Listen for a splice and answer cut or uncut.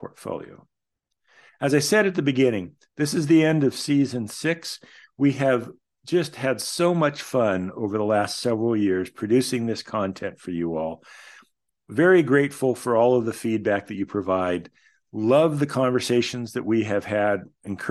uncut